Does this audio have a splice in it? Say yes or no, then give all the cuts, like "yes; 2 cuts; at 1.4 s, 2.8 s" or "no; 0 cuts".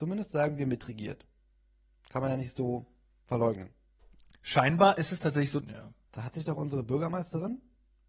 yes; 1 cut; at 5.6 s